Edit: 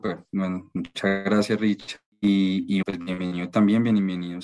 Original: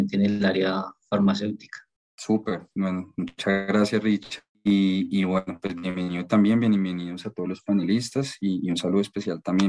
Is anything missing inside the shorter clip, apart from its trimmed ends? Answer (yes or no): yes